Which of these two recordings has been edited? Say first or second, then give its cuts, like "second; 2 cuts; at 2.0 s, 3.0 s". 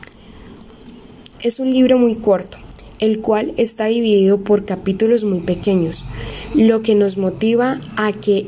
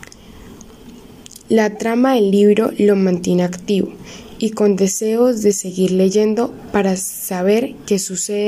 first; 1 cut; at 1.3 s